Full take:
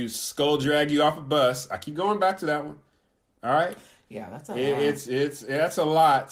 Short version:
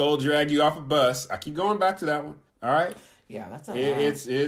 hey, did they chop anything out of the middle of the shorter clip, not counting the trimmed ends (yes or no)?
yes